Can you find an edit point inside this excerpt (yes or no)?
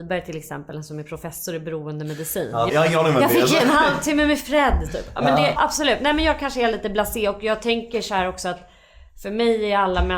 yes